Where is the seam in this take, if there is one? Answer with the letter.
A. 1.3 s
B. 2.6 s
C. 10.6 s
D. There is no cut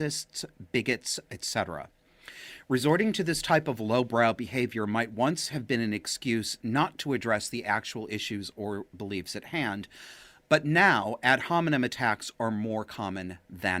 A